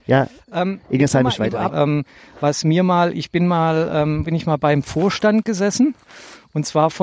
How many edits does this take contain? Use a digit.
2